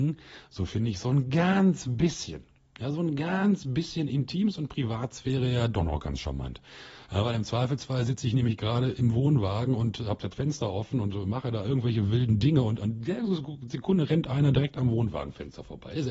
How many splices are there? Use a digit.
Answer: 0